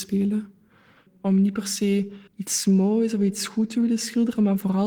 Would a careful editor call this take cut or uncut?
cut